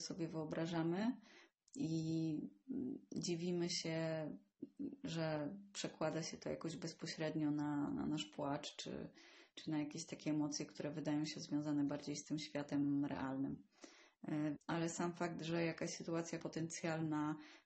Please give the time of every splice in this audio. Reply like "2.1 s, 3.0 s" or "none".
14.6 s, 16.4 s